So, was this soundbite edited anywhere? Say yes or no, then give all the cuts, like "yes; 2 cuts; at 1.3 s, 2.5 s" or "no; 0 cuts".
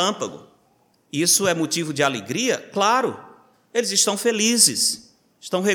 yes; 1 cut; at 0.9 s